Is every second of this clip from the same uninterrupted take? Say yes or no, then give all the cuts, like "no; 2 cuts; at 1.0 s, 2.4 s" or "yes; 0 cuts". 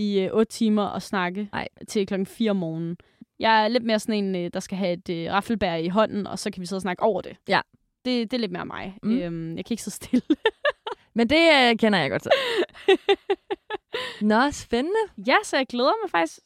yes; 0 cuts